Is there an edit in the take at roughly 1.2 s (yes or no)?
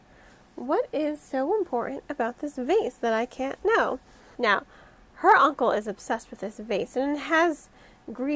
no